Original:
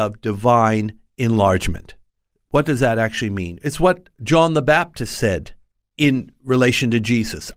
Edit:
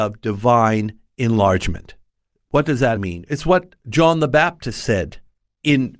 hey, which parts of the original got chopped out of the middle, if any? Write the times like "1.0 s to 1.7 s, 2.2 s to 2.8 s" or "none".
3.0 s to 3.3 s